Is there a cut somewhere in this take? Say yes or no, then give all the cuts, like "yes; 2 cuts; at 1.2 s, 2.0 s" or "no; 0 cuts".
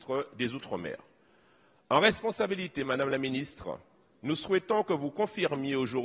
no; 0 cuts